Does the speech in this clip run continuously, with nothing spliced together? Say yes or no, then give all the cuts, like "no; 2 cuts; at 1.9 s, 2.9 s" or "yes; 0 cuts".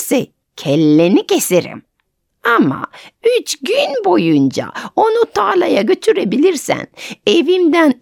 yes; 0 cuts